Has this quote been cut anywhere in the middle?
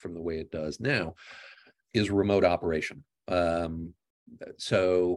yes; 1 cut; at 1.8 s

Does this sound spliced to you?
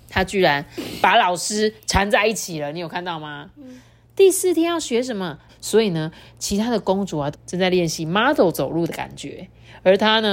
yes; 2 cuts; at 5.5 s, 7.3 s

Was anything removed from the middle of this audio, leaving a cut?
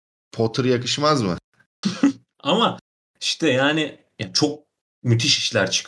yes; 1 cut; at 1.8 s

